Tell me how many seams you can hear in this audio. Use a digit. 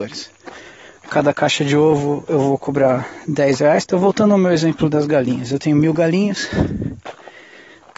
1